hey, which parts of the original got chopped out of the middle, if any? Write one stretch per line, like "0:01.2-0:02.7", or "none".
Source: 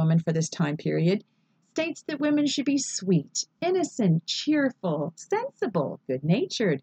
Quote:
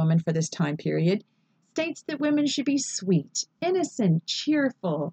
none